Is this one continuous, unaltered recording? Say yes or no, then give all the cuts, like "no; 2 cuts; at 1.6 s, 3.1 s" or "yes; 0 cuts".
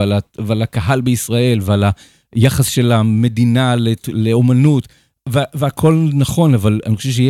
yes; 0 cuts